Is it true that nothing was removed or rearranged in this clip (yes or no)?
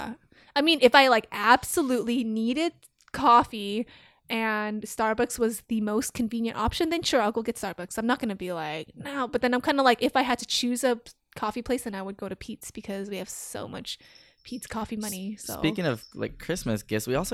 yes